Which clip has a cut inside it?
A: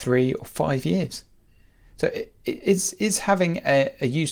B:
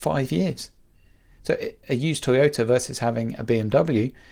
B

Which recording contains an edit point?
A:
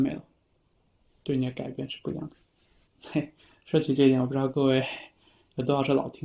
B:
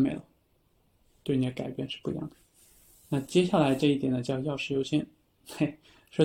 A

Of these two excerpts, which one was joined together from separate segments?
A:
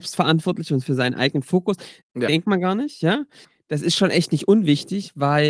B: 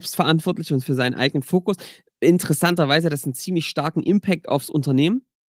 A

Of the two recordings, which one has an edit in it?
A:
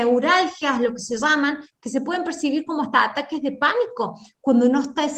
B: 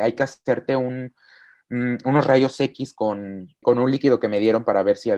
B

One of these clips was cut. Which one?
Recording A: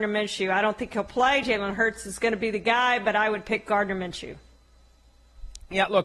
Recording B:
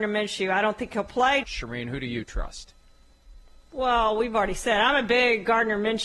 B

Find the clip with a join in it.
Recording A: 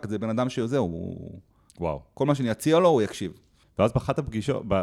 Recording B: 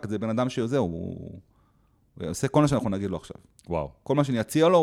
A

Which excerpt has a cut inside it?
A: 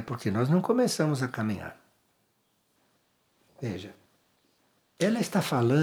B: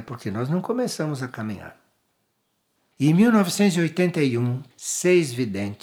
B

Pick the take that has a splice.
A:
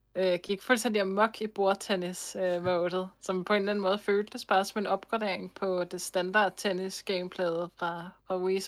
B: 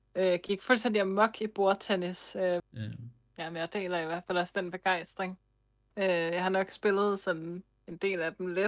B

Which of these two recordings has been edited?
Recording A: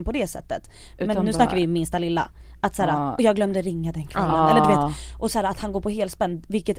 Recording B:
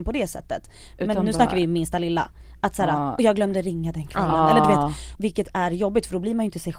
B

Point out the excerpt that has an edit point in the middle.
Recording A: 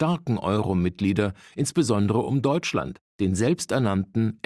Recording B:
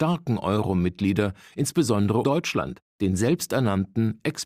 B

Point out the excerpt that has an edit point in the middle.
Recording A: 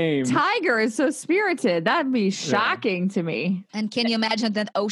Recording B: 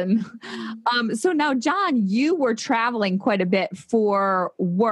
A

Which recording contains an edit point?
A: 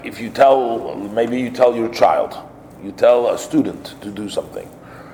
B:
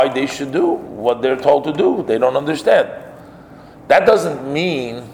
A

